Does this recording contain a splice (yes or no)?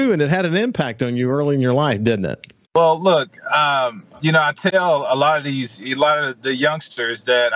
yes